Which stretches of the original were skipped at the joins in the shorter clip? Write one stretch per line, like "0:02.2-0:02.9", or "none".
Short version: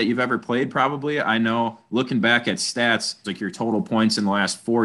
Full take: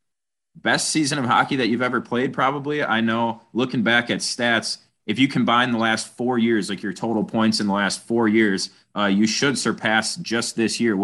0:04.9-0:06.7